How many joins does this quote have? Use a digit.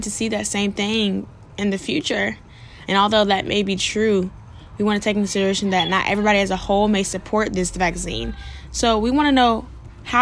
1